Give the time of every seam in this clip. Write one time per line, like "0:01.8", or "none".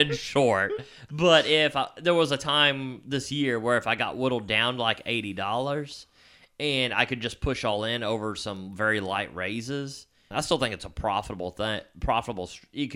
0:10.3